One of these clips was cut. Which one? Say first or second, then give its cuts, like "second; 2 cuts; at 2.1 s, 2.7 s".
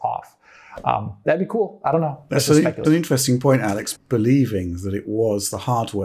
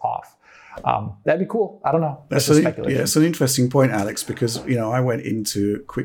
first; 2 cuts; at 2.8 s, 3.9 s